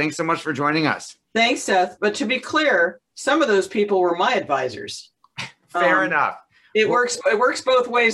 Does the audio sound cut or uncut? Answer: cut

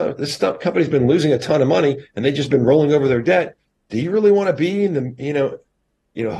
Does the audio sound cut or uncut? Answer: uncut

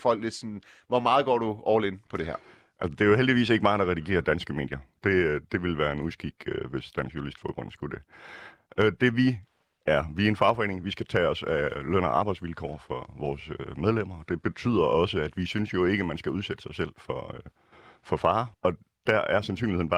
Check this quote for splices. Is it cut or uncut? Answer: cut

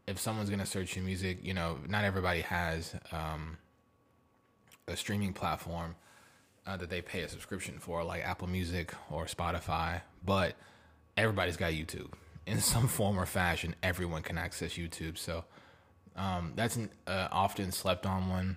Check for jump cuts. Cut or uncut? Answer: uncut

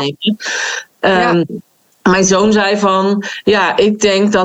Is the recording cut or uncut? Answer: uncut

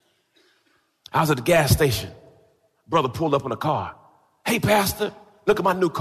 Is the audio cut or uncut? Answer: uncut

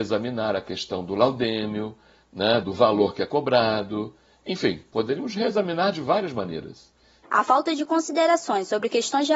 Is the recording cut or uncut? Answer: cut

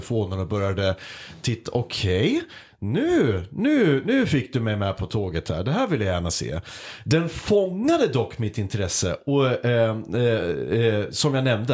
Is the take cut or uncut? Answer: cut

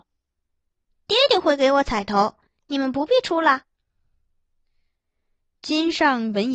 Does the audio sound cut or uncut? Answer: uncut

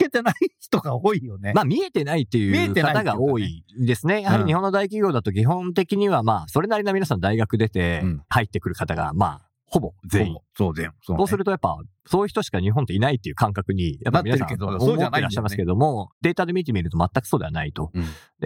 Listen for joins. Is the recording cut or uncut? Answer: uncut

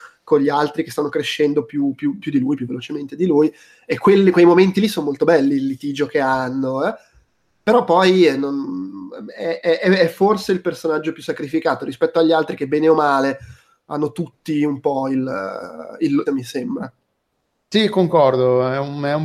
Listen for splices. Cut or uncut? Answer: cut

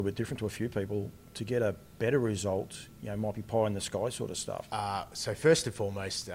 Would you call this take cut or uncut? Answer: cut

